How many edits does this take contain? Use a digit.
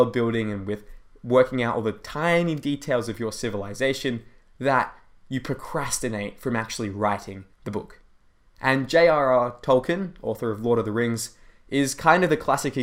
1